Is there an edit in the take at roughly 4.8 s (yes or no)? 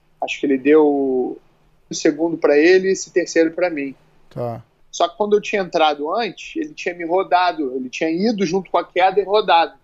yes